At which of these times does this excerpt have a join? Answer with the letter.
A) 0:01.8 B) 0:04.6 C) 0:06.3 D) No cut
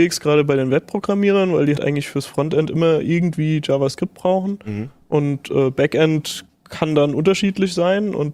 A